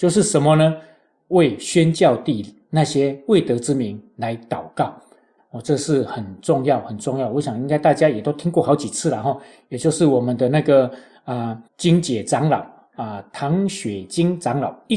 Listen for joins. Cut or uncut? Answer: cut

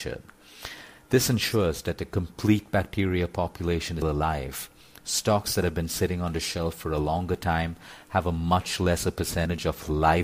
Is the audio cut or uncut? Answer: cut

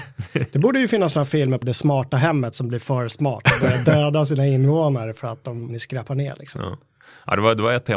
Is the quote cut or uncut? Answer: cut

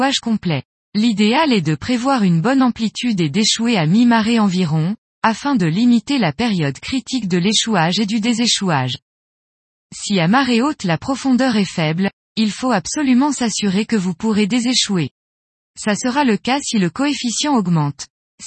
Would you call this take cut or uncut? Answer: uncut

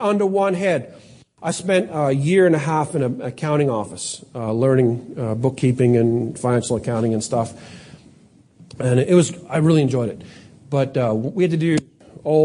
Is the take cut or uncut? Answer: uncut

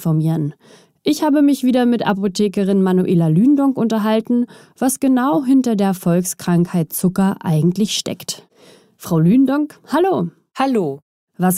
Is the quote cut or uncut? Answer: uncut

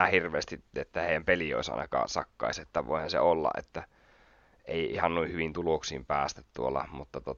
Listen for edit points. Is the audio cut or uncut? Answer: uncut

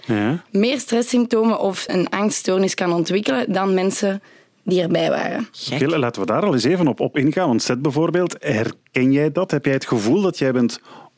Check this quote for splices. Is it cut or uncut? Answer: cut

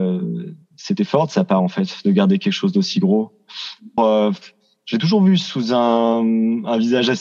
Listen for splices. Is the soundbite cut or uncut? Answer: cut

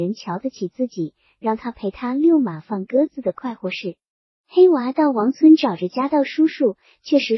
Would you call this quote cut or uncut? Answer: cut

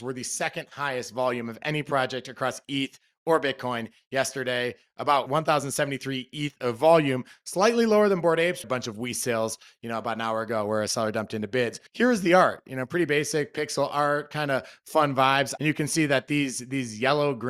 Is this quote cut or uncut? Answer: cut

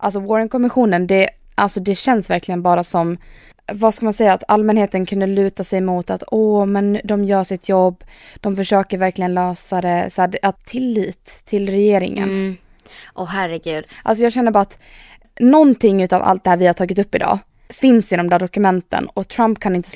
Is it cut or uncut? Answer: cut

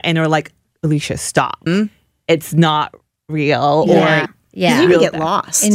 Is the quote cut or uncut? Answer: cut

